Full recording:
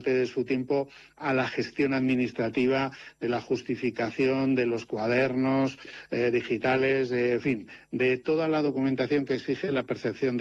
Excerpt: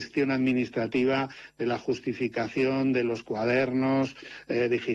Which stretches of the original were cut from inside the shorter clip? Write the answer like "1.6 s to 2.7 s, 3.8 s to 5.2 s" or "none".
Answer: none